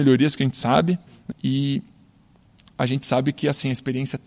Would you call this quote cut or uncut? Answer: cut